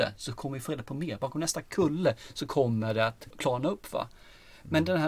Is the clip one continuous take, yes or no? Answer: no